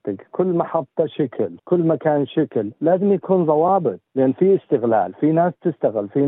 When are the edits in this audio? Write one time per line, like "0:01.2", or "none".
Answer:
0:01.6
0:04.1